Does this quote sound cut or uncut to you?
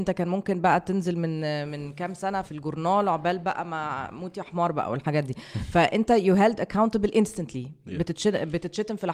cut